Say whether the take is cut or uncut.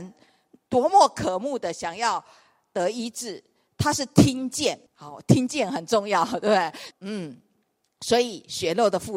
cut